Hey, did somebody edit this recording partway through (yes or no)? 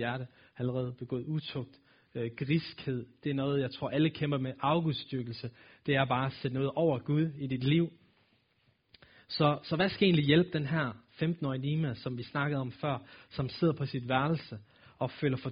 no